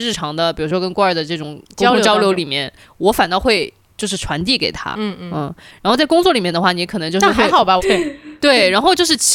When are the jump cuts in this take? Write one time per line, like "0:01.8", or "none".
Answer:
0:07.8